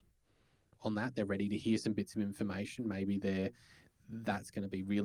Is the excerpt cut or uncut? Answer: uncut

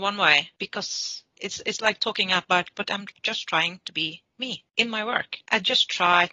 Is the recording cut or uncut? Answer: uncut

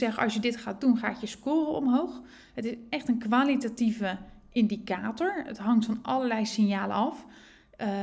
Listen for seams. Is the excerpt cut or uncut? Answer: uncut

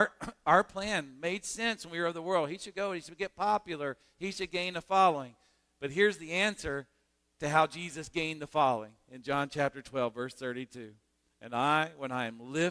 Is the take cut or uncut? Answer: uncut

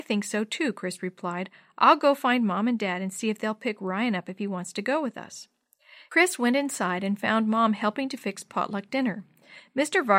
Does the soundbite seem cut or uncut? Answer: uncut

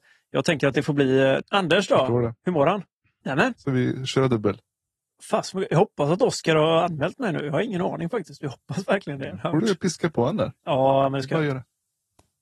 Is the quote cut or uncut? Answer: cut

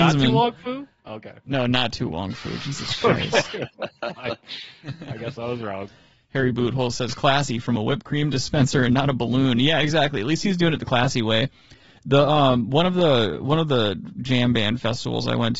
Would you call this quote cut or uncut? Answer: uncut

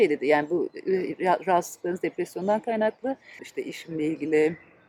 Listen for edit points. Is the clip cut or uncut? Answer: cut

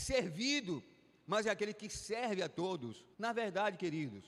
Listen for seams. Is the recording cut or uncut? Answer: cut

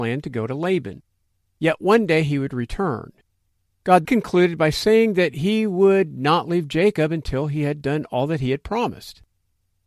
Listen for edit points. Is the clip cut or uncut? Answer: cut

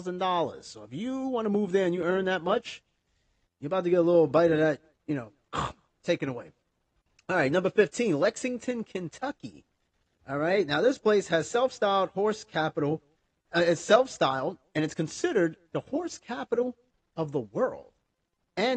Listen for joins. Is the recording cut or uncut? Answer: uncut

